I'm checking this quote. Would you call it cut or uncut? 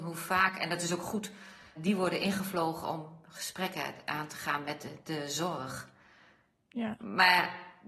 cut